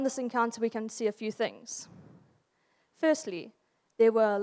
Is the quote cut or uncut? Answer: uncut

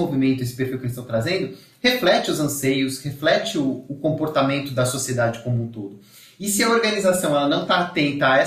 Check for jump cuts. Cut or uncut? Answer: uncut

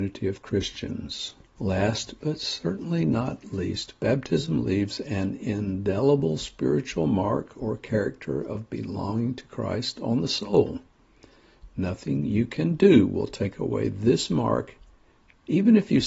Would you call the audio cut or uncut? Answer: cut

